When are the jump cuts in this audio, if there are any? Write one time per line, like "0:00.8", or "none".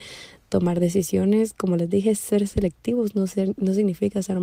none